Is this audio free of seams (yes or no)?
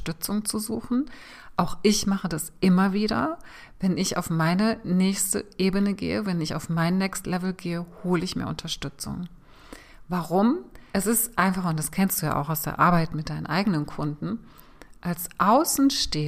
no